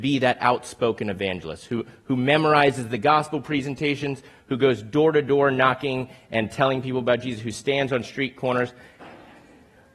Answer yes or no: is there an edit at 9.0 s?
yes